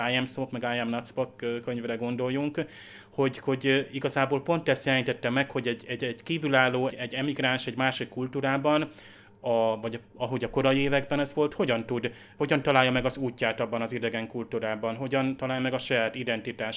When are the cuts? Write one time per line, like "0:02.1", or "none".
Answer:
0:06.9